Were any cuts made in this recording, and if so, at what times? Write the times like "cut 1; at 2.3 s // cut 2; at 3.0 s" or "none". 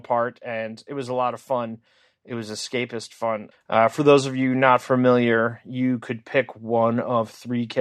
cut 1; at 3.5 s